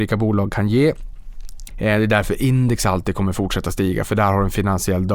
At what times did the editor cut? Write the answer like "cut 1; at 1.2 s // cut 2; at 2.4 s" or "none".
cut 1; at 1.7 s